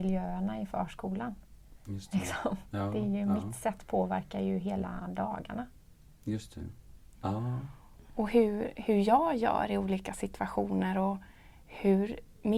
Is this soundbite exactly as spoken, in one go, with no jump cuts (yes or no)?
no